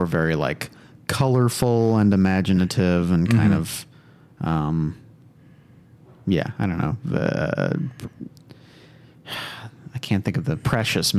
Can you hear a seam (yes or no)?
no